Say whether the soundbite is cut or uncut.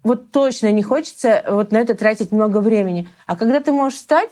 uncut